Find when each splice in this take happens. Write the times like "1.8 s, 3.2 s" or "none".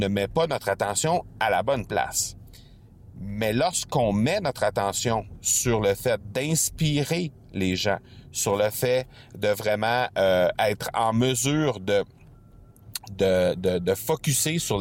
none